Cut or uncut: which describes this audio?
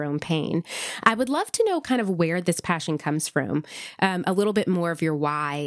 uncut